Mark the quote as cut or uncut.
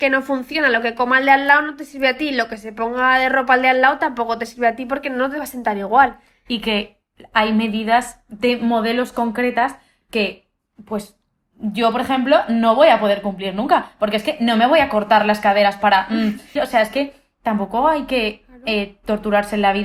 cut